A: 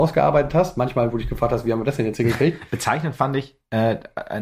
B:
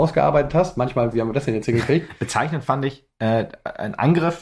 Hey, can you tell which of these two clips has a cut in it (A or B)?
B